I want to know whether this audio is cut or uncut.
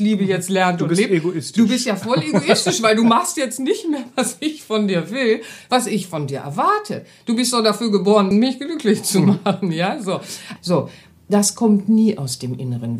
cut